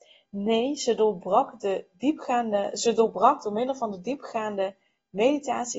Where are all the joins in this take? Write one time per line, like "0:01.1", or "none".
none